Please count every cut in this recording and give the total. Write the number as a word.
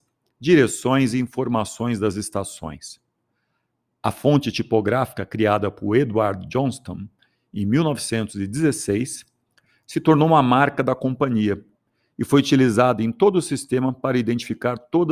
zero